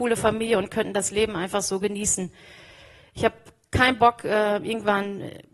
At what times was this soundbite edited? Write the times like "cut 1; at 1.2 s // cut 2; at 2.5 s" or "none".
none

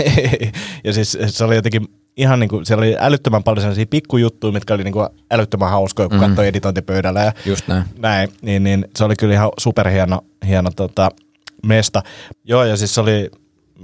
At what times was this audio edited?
cut 1; at 12.3 s

